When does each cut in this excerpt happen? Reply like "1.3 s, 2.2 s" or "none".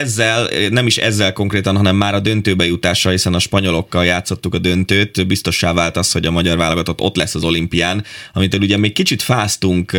none